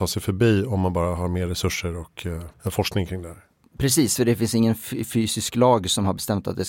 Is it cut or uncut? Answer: cut